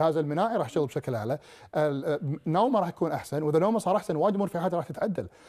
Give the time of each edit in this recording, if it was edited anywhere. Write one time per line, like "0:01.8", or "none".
none